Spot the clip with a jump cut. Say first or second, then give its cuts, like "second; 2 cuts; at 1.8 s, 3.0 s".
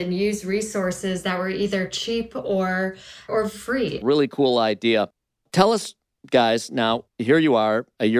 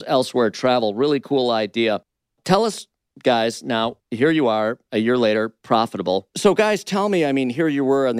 first; 1 cut; at 4.0 s